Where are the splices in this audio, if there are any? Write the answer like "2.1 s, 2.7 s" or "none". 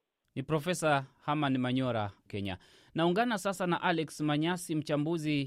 2.3 s